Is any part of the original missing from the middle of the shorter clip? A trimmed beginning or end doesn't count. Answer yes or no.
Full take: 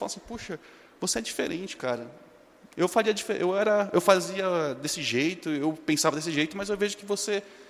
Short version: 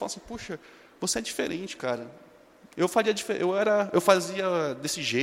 no